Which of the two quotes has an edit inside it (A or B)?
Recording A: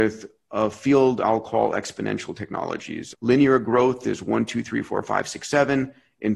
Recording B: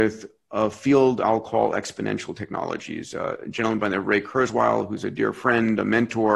A